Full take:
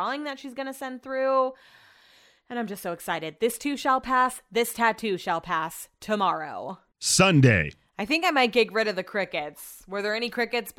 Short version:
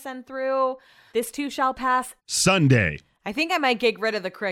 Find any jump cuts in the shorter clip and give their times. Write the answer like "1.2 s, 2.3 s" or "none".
1.1 s, 2.2 s